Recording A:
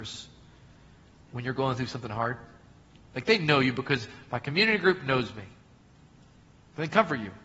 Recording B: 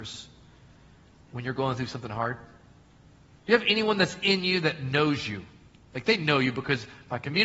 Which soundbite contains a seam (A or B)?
A